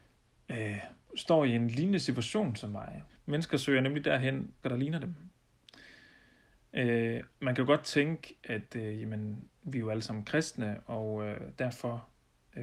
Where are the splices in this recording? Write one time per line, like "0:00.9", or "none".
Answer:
0:03.1
0:04.6
0:07.3